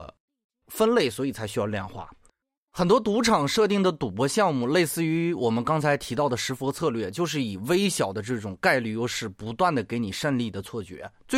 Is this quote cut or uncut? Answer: uncut